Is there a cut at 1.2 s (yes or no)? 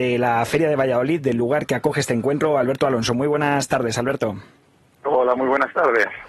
no